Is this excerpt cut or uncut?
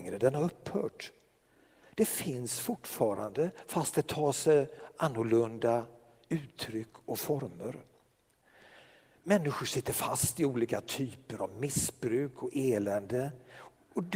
cut